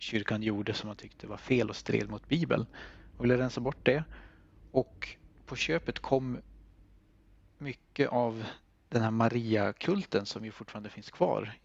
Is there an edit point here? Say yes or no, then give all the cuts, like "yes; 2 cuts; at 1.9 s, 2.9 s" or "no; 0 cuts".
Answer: no; 0 cuts